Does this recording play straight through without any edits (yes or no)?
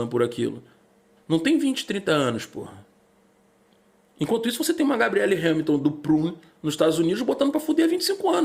no